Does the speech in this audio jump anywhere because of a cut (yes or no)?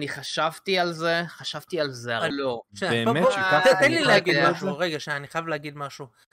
yes